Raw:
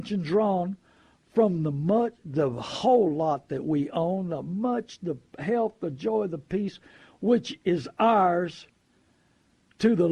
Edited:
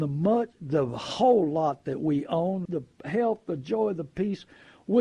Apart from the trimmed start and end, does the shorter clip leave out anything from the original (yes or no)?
yes